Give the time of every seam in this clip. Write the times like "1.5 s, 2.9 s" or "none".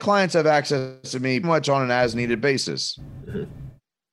1.4 s